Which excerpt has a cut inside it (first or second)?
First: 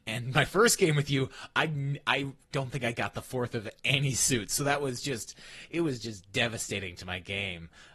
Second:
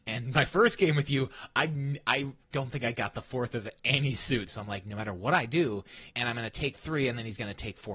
second